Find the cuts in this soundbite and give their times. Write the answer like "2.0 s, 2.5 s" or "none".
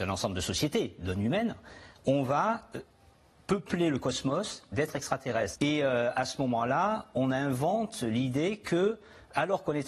5.5 s